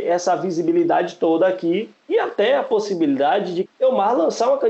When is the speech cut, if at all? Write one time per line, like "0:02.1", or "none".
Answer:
0:03.7